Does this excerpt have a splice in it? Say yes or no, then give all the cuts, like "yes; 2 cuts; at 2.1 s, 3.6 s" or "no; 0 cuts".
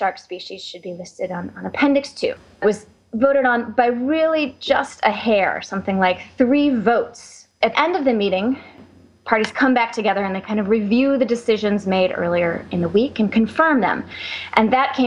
yes; 1 cut; at 7.7 s